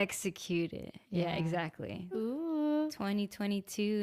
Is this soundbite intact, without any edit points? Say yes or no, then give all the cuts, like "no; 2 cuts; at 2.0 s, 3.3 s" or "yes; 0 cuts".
no; 1 cut; at 2.1 s